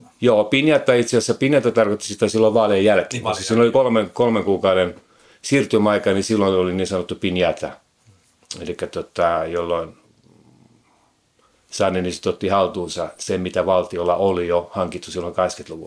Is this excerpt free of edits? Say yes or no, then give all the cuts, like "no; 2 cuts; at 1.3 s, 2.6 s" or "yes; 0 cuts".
yes; 0 cuts